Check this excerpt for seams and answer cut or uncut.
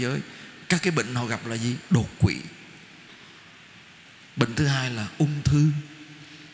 uncut